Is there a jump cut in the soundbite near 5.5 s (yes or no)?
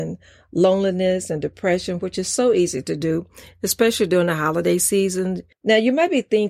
yes